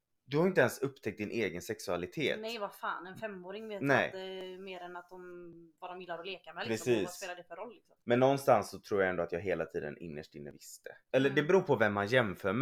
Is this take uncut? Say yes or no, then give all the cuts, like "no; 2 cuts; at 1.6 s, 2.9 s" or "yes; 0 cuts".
no; 2 cuts; at 8.0 s, 11.1 s